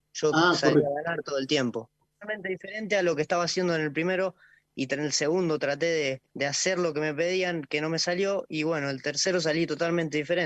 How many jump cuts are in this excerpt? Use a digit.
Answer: 2